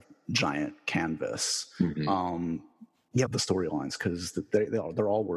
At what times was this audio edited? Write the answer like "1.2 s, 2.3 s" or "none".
3.3 s